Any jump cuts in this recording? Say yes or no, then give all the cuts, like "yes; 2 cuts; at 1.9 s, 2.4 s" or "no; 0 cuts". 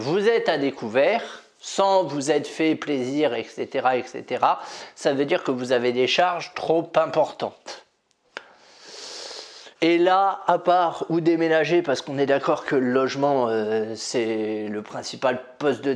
yes; 1 cut; at 9.7 s